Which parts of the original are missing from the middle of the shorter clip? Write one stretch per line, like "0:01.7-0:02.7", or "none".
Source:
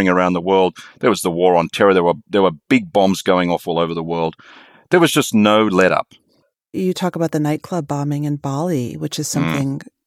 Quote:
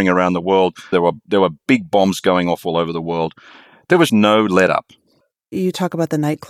0:00.9-0:01.9
0:05.1-0:05.3